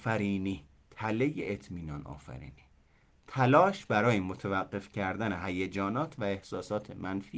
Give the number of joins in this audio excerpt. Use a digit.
0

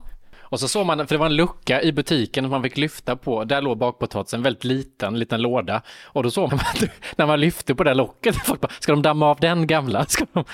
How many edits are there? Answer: 1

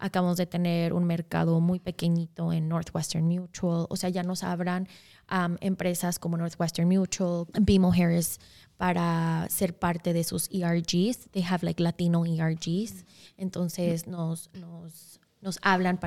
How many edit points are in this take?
0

